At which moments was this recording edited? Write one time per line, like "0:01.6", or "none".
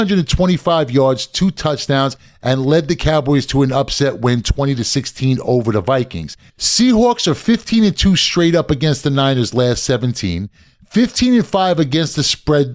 0:06.5